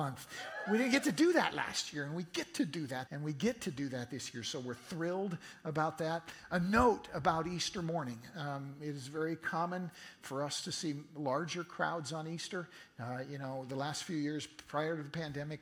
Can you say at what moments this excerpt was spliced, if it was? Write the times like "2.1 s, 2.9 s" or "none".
3.1 s